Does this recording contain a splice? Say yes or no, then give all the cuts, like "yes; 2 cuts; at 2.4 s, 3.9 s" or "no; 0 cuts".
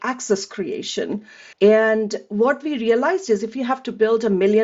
yes; 1 cut; at 1.5 s